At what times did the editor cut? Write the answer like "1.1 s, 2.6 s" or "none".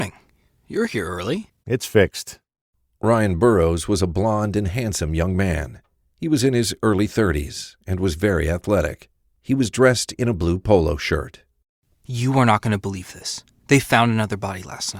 1.6 s

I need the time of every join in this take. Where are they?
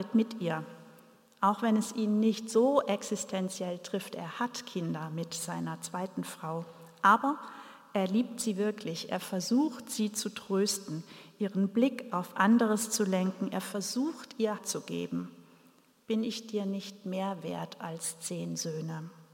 14.6 s

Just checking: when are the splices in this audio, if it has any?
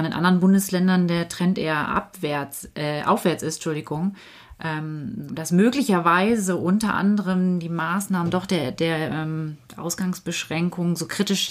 5.3 s

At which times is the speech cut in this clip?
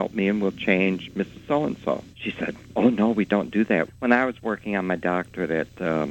2.1 s, 3.9 s

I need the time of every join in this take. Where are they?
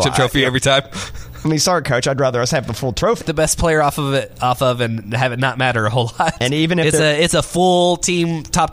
3.2 s

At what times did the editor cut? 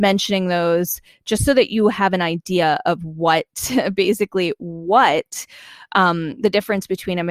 none

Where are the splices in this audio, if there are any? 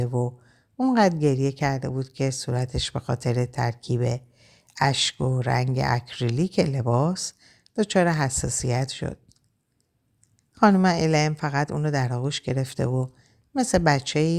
none

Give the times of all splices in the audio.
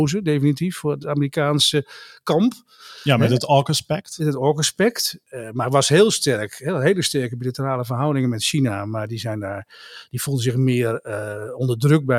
none

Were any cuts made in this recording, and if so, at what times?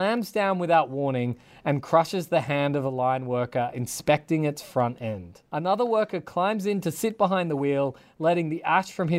5.5 s

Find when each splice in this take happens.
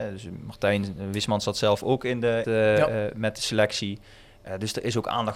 2.4 s

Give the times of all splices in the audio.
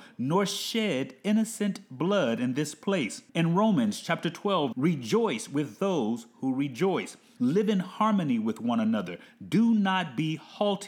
3.3 s, 4.7 s, 7.4 s

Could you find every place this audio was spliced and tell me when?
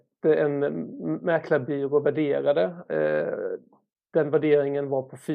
none

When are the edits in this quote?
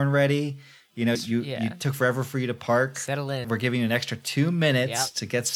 1.2 s, 3.4 s

